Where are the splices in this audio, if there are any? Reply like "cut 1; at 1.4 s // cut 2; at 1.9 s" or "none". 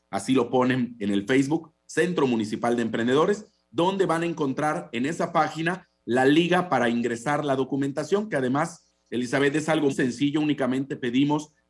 cut 1; at 9.9 s